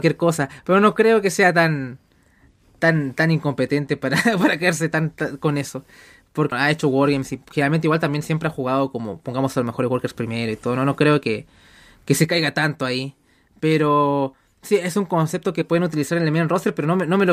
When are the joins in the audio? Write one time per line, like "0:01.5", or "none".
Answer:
0:06.5